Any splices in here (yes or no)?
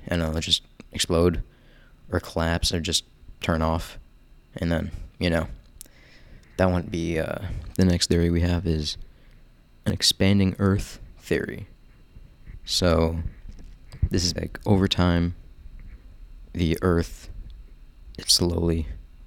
yes